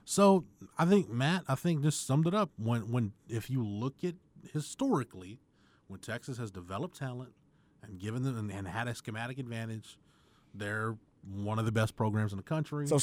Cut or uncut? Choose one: uncut